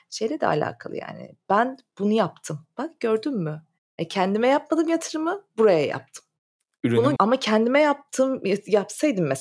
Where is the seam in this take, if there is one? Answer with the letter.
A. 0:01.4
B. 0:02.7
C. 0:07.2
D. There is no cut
C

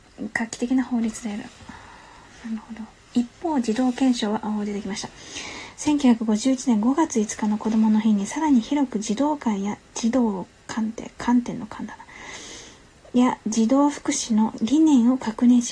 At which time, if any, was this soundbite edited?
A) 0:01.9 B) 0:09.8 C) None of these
B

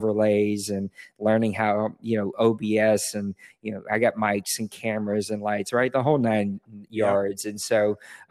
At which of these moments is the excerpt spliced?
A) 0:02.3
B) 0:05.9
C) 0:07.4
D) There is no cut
D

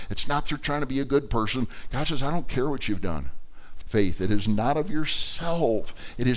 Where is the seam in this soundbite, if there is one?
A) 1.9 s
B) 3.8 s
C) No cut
B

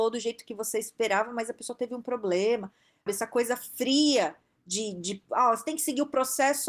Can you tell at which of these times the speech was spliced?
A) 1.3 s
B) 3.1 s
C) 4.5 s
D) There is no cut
B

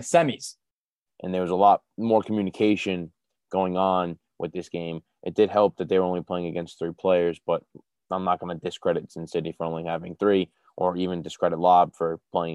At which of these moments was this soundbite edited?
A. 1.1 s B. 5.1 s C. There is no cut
A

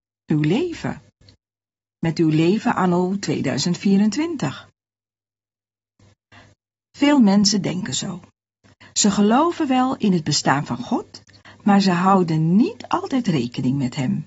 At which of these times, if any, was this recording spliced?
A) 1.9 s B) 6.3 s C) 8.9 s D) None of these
D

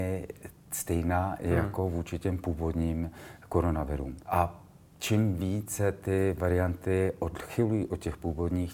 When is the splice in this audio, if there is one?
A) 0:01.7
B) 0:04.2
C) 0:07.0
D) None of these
B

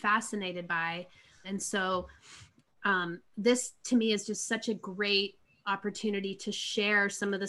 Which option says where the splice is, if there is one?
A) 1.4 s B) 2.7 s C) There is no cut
A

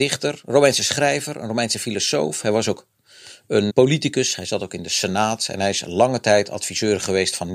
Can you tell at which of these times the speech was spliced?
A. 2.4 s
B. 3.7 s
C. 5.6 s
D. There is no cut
B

